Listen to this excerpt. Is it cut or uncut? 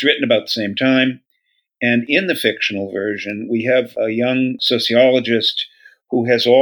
uncut